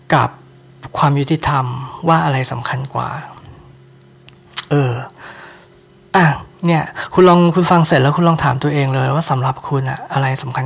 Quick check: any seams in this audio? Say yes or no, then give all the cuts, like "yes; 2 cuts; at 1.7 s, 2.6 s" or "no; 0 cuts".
no; 0 cuts